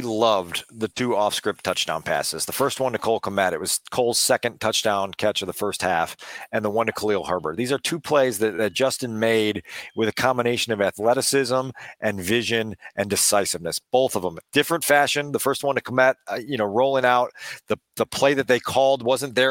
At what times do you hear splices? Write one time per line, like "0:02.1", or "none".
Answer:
none

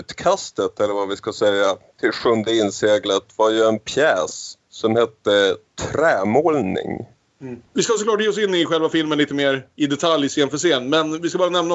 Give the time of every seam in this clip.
0:07.7

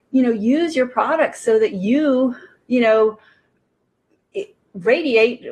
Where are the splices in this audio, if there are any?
none

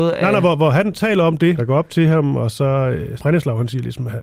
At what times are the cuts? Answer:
0:01.6
0:03.2

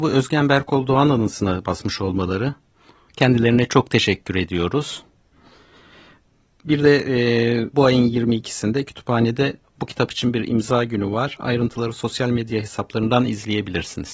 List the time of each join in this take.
none

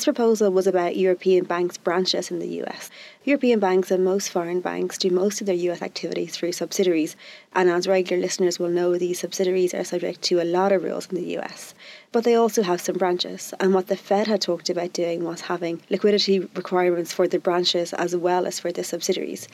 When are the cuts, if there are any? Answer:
none

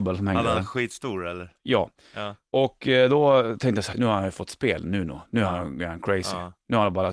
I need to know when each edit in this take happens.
0:03.9

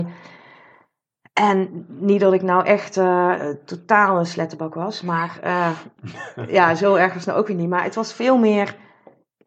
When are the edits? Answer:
none

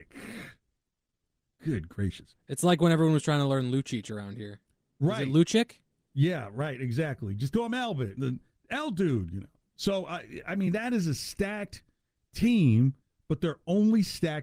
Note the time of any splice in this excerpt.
none

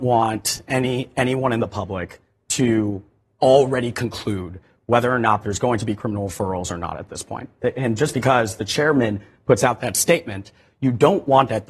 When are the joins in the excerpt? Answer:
none

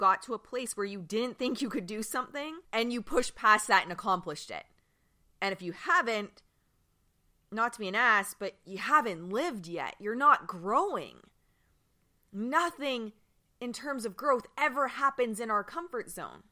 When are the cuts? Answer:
0:02.6

